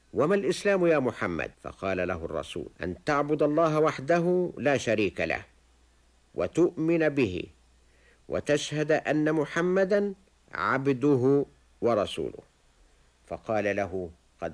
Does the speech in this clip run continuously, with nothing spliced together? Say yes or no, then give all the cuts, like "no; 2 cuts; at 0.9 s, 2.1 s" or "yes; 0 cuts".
no; 2 cuts; at 1.5 s, 2.7 s